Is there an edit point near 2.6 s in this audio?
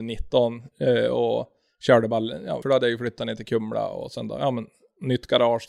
yes; 1 cut; at 2.6 s

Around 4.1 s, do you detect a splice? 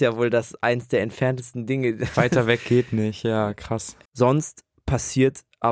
yes; 1 cut; at 4.1 s

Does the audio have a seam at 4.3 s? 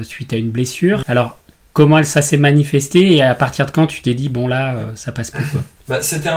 no; 1 cut; at 1.0 s

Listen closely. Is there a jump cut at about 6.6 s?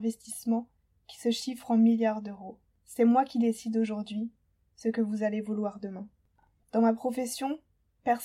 yes; 1 cut; at 6.6 s

